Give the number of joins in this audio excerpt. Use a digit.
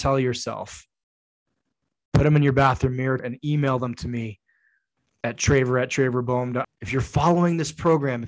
2